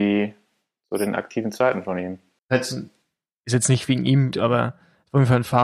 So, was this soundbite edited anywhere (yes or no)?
yes